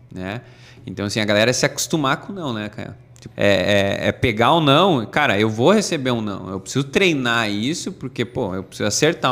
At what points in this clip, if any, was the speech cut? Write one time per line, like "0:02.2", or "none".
0:03.3